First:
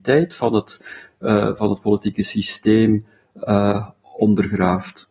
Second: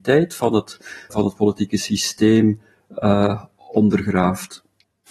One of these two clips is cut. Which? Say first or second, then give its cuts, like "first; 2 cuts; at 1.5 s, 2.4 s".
second; 1 cut; at 1.1 s